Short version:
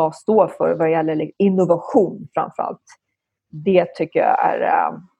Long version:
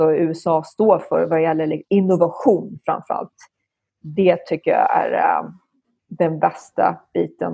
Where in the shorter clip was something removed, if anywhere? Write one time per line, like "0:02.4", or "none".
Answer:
none